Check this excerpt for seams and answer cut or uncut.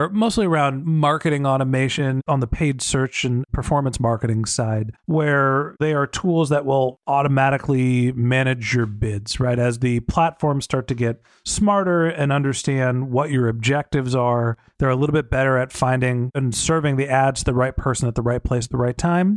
cut